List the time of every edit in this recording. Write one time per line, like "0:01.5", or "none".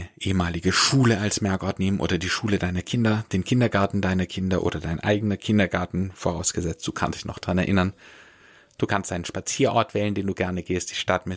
none